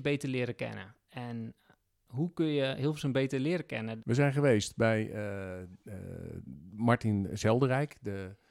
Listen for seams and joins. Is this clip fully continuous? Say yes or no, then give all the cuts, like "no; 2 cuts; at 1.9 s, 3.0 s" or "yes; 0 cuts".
no; 1 cut; at 4.0 s